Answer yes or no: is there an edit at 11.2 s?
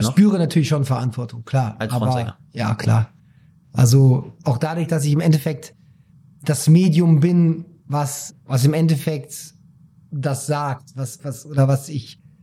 yes